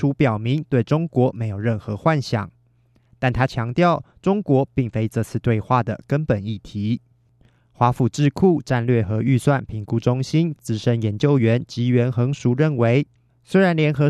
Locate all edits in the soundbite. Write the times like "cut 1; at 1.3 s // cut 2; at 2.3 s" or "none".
none